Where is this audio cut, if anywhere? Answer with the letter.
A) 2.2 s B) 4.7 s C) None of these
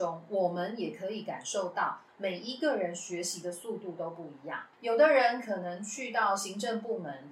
B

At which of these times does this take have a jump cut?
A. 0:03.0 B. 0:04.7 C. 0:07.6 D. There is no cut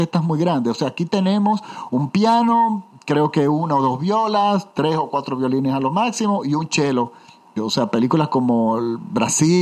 C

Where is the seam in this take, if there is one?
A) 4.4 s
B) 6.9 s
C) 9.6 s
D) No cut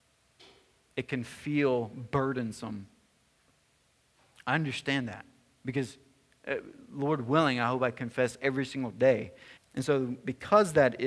C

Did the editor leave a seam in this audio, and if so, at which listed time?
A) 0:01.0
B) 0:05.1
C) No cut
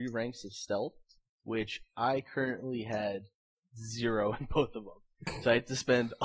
C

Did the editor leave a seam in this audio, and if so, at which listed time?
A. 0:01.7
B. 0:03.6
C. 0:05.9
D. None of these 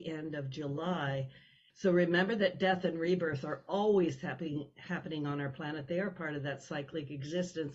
A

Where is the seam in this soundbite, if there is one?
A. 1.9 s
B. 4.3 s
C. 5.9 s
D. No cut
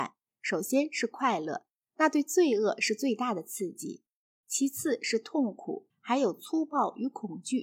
C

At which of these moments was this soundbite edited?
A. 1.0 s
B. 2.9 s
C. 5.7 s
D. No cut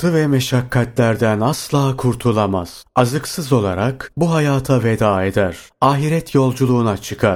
D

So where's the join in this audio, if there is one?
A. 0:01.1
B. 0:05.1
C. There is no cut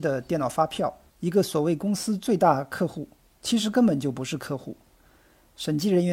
A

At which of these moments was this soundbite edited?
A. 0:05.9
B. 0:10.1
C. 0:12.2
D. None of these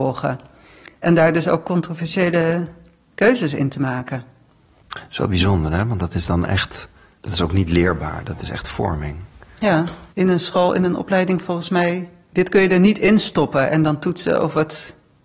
B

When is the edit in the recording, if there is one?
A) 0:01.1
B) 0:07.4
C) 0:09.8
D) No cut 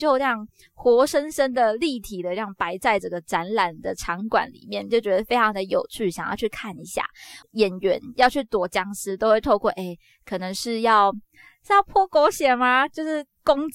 B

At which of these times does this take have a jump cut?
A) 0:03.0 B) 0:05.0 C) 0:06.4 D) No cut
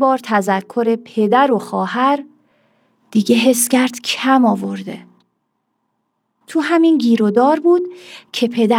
D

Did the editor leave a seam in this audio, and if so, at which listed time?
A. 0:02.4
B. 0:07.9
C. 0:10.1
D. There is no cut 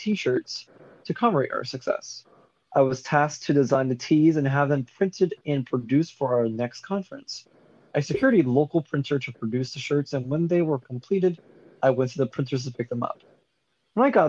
D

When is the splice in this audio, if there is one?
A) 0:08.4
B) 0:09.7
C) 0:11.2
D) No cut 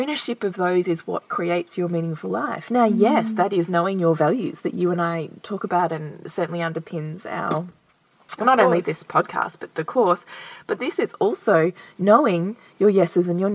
B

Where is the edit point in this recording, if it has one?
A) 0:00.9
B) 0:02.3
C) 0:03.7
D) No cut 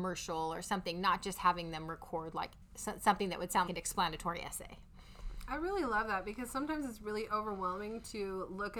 C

